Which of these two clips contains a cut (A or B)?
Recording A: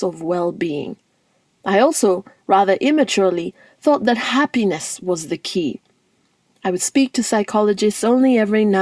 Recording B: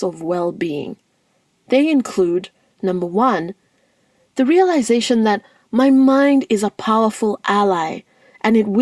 A